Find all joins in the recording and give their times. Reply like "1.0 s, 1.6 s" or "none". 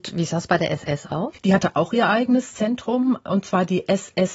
1.4 s